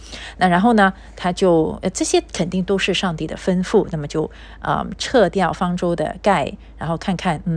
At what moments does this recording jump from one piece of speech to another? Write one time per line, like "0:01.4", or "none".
none